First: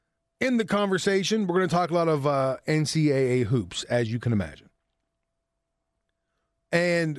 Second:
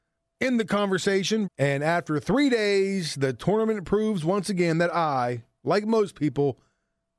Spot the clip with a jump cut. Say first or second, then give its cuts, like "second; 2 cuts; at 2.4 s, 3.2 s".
second; 1 cut; at 1.5 s